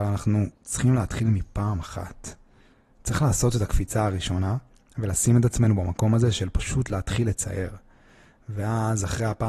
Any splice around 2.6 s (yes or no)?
no